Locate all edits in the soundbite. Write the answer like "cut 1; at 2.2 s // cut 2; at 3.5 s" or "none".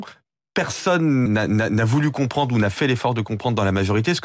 cut 1; at 1.3 s